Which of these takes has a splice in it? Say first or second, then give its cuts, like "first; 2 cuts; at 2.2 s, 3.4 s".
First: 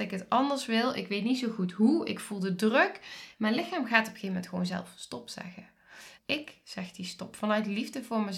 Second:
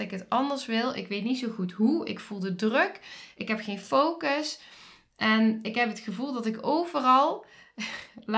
first; 2 cuts; at 3.3 s, 6.2 s